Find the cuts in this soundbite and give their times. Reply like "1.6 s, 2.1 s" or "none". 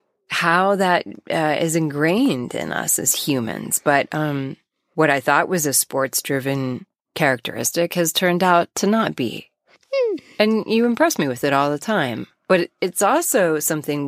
none